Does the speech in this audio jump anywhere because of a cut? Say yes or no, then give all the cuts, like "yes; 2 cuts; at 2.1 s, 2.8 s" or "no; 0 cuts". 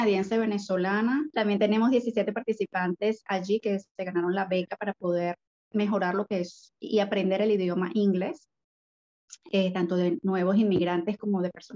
yes; 2 cuts; at 1.3 s, 3.3 s